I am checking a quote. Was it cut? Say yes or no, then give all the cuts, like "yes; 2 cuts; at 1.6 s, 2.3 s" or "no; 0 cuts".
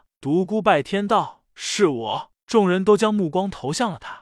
no; 0 cuts